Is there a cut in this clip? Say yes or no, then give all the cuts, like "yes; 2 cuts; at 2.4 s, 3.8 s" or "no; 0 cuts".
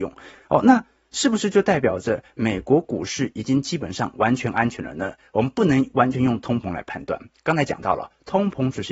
no; 0 cuts